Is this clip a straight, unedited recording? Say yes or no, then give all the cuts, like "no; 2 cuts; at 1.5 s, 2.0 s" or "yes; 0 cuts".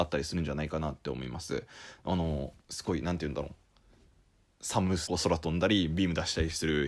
no; 2 cuts; at 2.6 s, 5.1 s